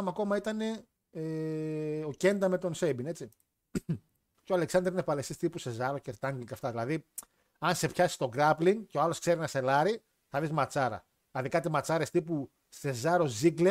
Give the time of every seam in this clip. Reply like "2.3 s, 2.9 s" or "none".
4.3 s